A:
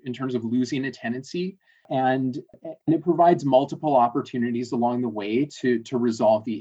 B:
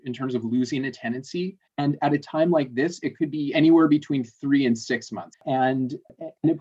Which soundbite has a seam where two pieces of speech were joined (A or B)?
B